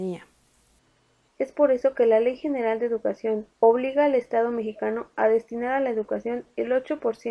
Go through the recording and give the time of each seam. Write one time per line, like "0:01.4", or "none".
0:01.3
0:03.5